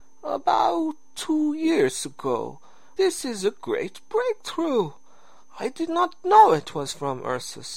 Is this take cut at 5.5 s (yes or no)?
no